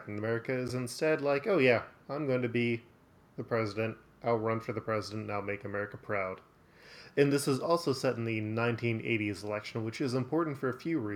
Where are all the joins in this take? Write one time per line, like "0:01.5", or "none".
none